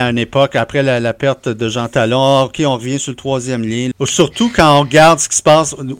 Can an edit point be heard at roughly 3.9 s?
yes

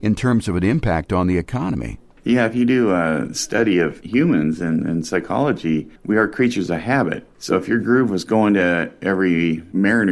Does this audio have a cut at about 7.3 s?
yes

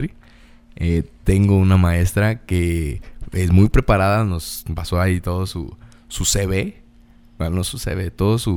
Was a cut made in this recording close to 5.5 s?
no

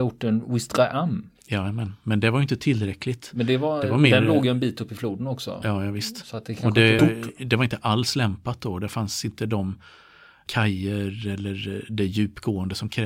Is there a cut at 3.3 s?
no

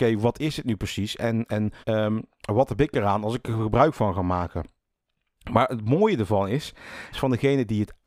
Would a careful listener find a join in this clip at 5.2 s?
no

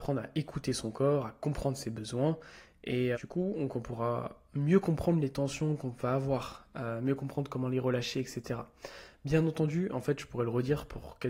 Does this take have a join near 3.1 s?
yes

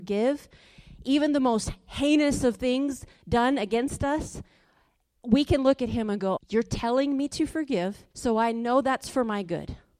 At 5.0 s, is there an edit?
no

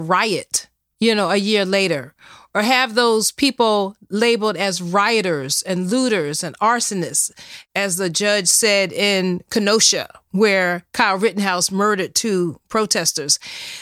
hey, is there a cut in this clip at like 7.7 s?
no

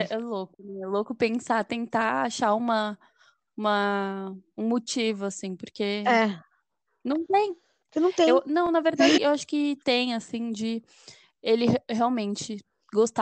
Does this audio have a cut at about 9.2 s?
yes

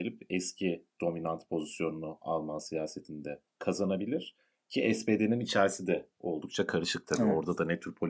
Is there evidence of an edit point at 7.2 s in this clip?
no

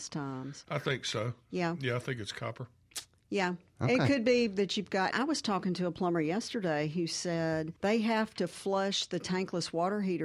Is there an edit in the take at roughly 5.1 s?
yes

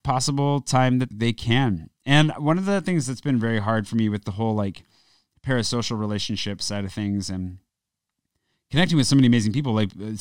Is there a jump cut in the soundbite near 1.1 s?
yes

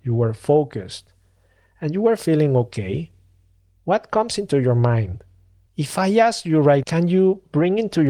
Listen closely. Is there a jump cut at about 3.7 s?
no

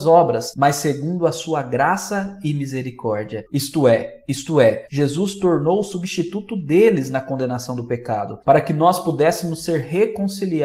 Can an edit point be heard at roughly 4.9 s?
yes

